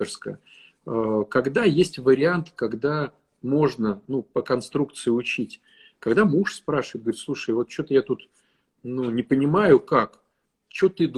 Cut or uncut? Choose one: uncut